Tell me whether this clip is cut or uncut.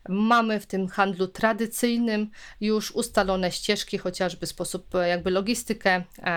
uncut